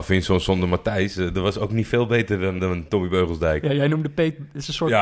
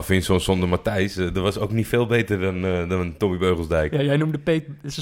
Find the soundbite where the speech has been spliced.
first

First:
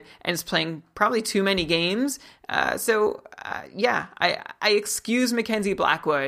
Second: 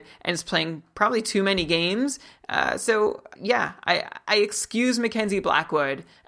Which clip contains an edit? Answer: second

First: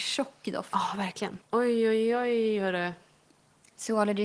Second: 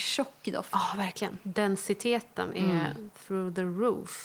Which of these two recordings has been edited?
first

